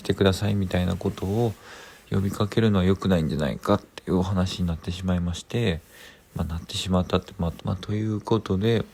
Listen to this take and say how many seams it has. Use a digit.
1